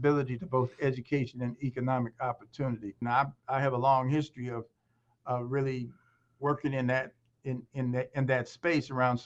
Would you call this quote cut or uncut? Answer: cut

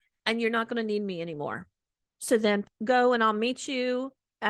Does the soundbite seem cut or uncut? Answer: cut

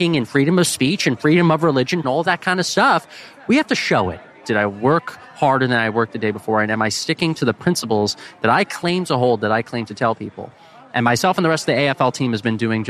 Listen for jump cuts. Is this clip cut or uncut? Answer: cut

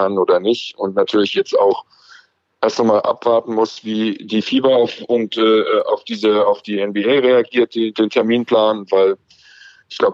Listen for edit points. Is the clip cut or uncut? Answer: cut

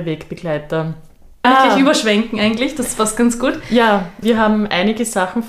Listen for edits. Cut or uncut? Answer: cut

